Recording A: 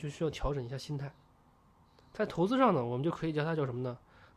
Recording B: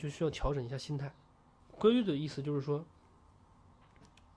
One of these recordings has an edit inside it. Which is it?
B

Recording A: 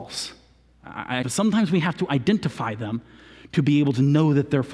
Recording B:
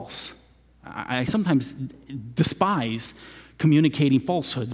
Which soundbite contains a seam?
A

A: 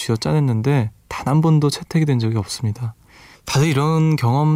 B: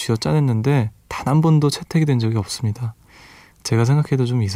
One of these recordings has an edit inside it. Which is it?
A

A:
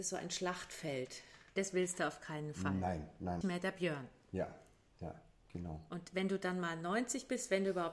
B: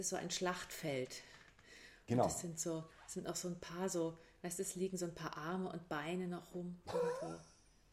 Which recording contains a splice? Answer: A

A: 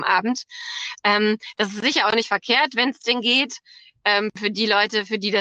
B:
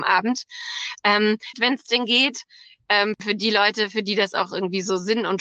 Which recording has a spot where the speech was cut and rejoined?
B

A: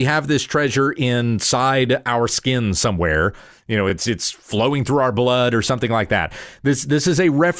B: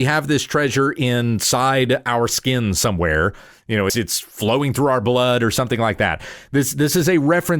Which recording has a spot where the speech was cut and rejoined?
B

